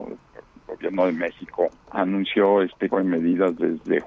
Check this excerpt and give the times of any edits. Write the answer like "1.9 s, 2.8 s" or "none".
1.8 s, 2.9 s